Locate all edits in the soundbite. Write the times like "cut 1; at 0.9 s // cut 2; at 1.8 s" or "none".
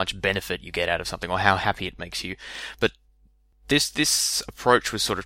none